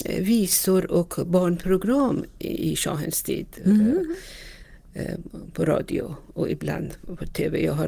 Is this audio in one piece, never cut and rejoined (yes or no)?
yes